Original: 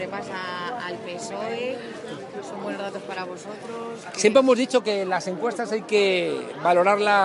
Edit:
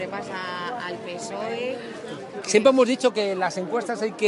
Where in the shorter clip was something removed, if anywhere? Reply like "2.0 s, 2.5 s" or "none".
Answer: 2.4 s